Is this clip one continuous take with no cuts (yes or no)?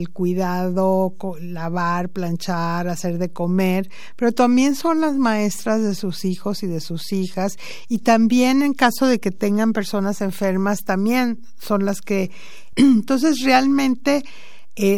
no